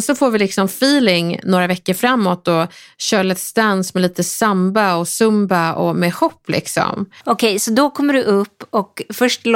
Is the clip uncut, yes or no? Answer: no